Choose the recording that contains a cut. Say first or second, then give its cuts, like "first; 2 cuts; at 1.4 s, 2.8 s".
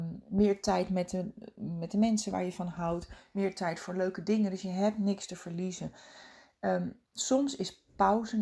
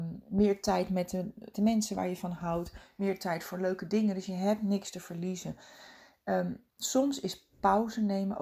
second; 1 cut; at 1.5 s